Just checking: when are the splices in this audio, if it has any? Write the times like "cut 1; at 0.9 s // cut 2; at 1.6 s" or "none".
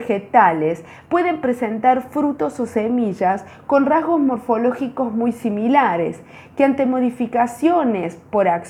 none